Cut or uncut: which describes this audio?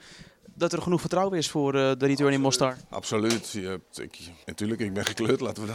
cut